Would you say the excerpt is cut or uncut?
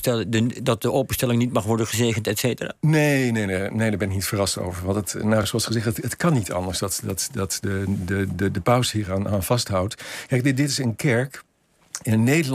uncut